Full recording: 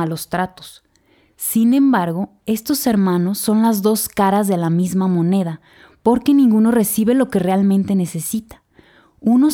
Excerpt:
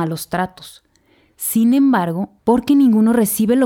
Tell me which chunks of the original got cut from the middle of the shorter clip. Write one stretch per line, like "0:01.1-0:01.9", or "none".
0:02.4-0:06.0